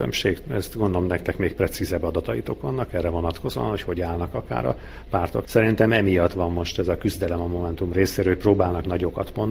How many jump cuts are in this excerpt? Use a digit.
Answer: 1